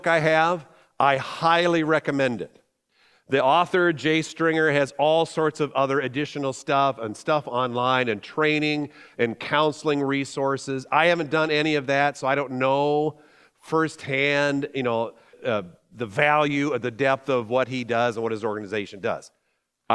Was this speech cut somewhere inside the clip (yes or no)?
yes